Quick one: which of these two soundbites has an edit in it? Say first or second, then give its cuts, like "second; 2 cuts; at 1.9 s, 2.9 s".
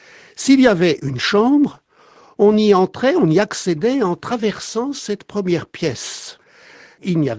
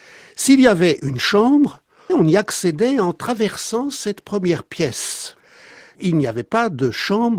second; 1 cut; at 2.1 s